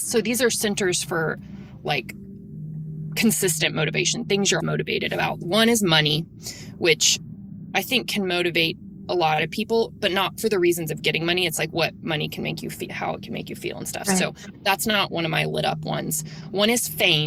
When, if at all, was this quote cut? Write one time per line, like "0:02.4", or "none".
0:04.6